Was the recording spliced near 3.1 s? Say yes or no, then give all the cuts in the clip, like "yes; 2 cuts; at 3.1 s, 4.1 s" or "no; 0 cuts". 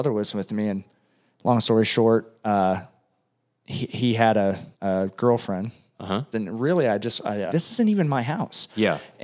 no; 3 cuts; at 4.7 s, 6.3 s, 7.5 s